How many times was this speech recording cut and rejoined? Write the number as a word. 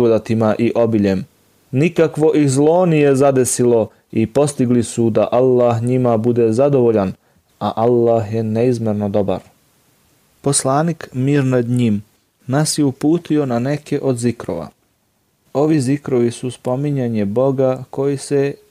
one